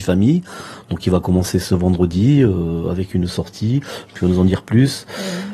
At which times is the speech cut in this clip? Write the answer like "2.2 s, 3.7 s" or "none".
4.1 s